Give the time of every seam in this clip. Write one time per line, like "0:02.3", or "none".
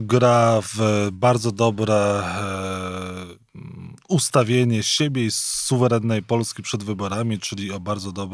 none